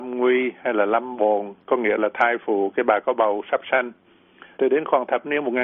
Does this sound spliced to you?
yes; 1 cut; at 4.5 s

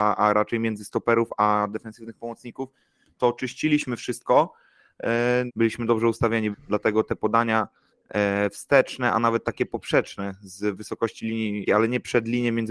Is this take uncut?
no; 3 cuts; at 5.5 s, 6.5 s, 11.7 s

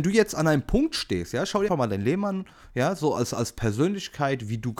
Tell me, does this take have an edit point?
yes; 1 cut; at 1.7 s

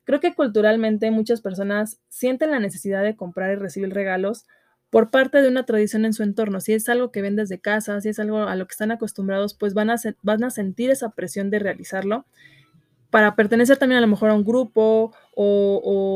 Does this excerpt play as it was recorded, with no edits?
yes; 0 cuts

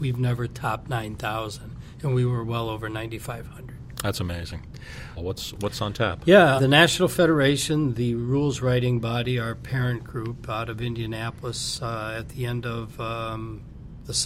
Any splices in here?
yes; 2 cuts; at 5.2 s, 6.6 s

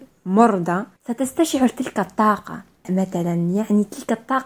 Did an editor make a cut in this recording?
yes; 1 cut; at 1.0 s

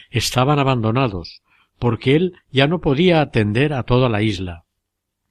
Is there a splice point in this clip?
yes; 1 cut; at 1.7 s

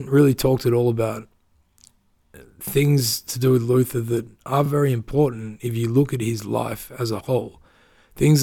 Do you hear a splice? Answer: no; 0 cuts

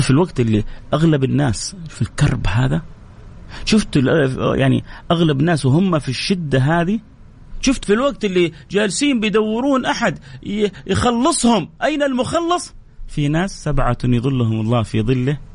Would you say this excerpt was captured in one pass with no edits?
no; 1 cut; at 7.8 s

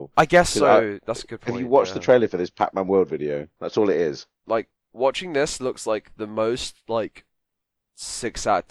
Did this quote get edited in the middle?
yes; 1 cut; at 3.6 s

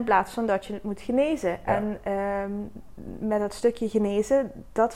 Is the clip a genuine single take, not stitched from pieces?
yes; 0 cuts

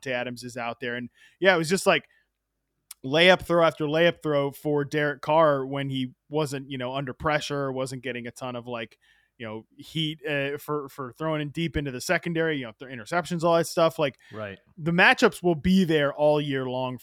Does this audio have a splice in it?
no; 0 cuts

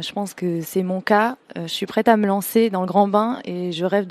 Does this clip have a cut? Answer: no; 0 cuts

